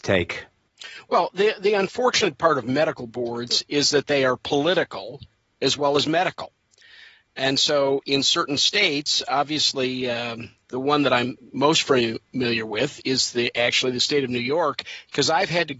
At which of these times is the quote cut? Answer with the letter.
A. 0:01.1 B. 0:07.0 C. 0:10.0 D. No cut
D